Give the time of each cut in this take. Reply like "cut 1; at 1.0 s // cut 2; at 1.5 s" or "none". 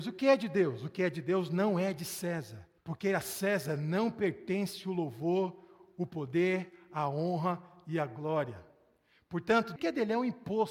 cut 1; at 2.8 s // cut 2; at 9.8 s